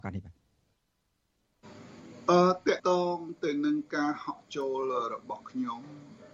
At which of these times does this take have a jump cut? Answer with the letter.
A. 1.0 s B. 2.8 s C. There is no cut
B